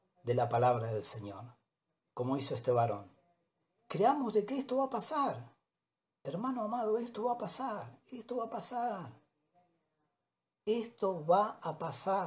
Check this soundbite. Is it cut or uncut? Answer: uncut